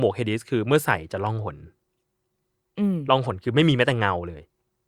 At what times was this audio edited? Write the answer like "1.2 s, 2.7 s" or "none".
none